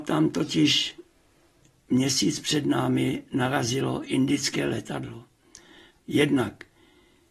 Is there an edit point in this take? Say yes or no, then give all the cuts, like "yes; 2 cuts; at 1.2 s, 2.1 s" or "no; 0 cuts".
yes; 1 cut; at 6.0 s